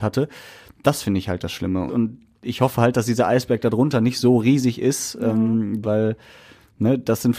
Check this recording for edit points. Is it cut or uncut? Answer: cut